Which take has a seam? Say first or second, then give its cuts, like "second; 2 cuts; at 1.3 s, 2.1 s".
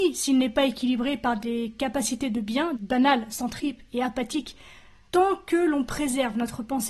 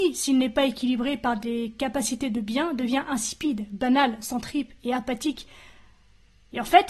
first; 2 cuts; at 2.8 s, 5.1 s